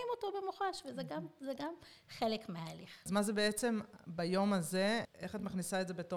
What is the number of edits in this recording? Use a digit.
1